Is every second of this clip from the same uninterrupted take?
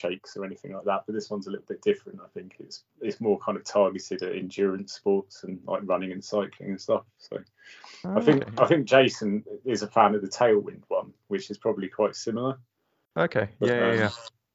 yes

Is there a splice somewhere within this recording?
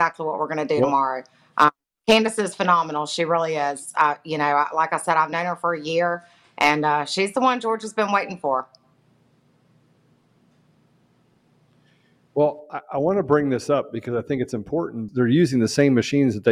yes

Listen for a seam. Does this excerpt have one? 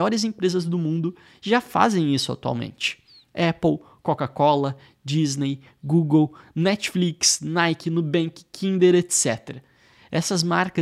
no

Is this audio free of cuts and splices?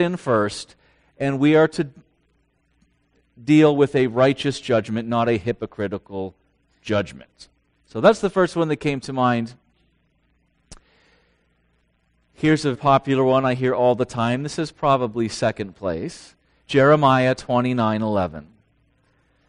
no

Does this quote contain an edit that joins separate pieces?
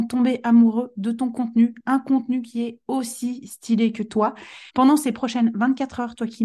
yes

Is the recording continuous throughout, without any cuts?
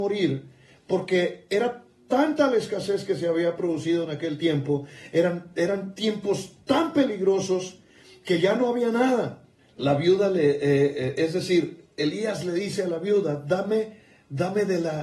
no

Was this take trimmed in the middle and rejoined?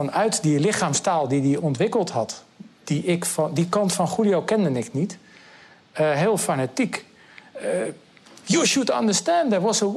no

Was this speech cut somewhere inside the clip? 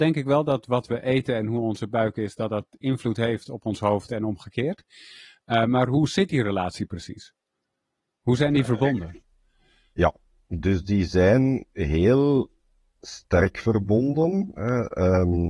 no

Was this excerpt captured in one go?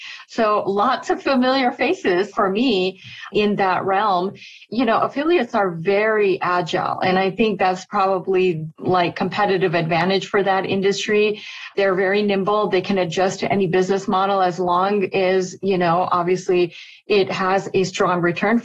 yes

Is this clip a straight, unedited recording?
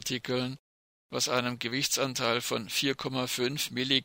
yes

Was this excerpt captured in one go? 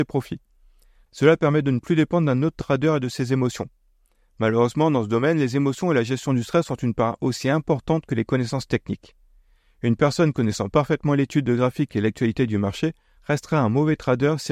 no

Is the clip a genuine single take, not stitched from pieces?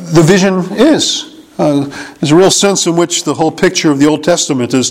yes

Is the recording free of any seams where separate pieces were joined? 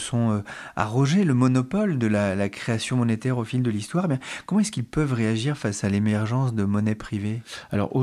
yes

